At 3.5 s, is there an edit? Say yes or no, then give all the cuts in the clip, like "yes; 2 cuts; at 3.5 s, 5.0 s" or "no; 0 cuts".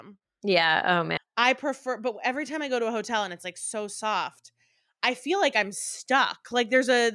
no; 1 cut; at 1.2 s